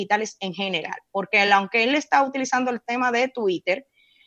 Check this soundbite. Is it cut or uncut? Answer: uncut